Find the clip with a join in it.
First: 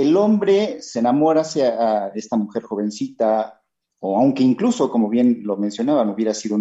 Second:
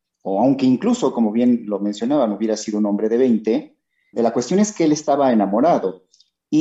second; 1 cut; at 4.1 s

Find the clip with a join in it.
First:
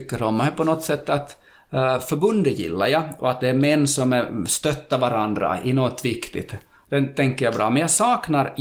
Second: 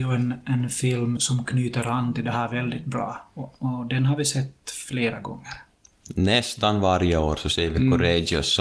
second; 1 cut; at 1.2 s

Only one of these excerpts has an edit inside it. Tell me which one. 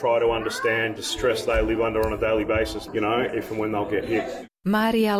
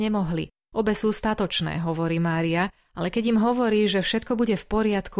first; 2 cuts; at 1.0 s, 2.9 s

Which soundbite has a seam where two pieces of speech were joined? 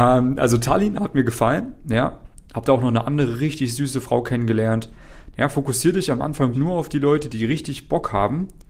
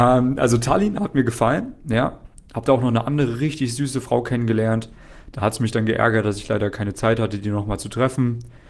first; 2 cuts; at 5.3 s, 6.5 s

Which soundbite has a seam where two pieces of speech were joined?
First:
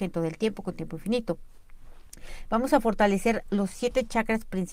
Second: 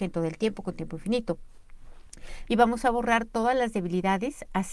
second; 1 cut; at 2.5 s

